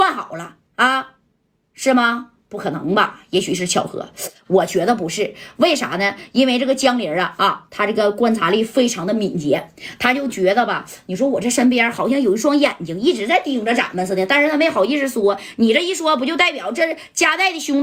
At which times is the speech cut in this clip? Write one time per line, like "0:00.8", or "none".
none